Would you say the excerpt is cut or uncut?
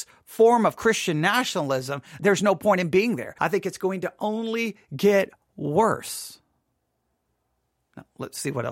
cut